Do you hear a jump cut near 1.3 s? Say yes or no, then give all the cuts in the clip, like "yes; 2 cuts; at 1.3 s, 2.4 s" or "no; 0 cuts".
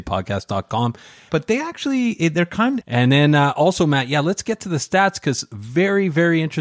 yes; 2 cuts; at 1.3 s, 2.8 s